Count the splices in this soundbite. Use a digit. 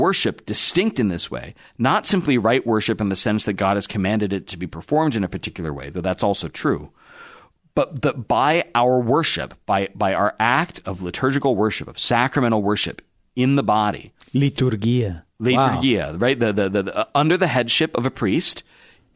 0